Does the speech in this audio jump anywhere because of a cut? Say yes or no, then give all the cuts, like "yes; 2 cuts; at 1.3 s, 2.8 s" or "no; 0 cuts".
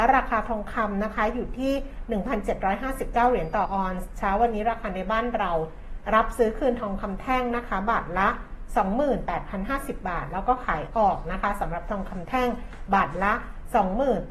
yes; 1 cut; at 3.6 s